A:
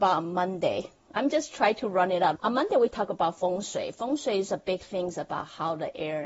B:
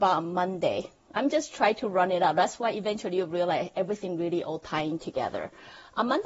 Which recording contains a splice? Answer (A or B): A